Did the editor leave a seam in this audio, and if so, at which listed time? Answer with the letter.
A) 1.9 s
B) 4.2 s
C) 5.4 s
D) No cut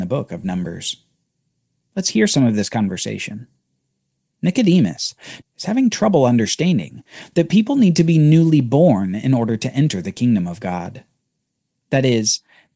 C